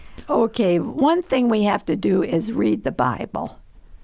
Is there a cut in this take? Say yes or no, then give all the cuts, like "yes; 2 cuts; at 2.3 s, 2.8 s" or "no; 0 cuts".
no; 0 cuts